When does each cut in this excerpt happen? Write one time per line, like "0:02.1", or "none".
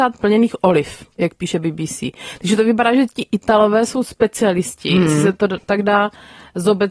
none